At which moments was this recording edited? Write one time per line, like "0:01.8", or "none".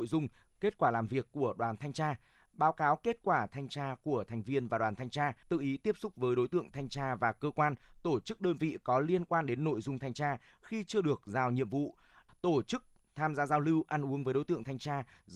0:05.4
0:12.3